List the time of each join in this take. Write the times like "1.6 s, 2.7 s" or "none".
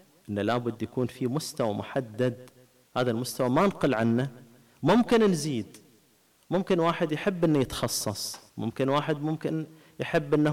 8.5 s